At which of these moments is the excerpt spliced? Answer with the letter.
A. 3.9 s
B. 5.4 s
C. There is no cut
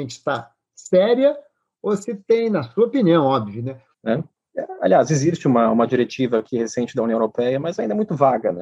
A